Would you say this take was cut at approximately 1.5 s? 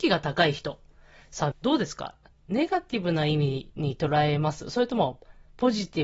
yes; 1 cut; at 1.5 s

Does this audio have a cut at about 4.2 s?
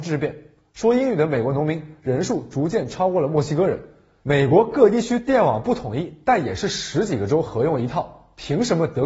yes; 1 cut; at 4.2 s

